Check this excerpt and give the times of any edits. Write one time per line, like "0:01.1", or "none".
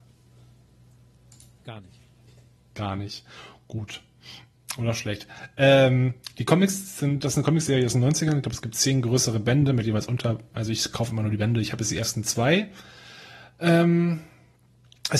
none